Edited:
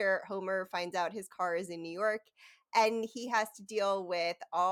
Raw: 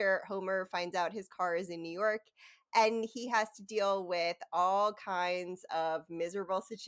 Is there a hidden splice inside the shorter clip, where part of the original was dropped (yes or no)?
no